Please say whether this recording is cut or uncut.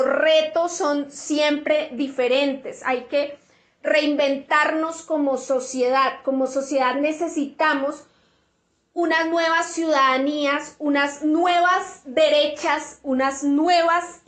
uncut